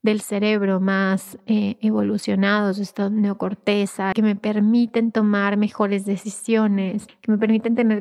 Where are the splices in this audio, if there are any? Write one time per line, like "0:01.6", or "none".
0:04.1
0:07.1